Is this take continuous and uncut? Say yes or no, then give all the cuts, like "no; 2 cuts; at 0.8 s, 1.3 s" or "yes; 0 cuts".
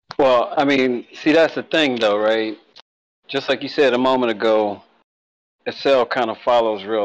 yes; 0 cuts